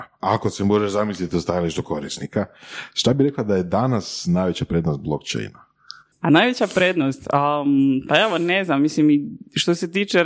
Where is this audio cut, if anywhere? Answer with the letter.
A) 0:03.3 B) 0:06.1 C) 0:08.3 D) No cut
B